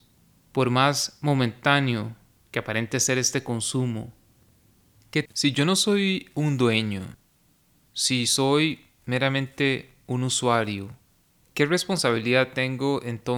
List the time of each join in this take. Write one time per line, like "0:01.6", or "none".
0:05.3